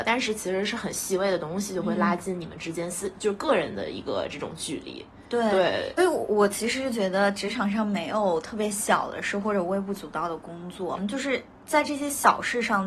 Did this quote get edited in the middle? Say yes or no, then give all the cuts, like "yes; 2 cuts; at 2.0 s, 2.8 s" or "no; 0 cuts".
yes; 2 cuts; at 6.0 s, 11.0 s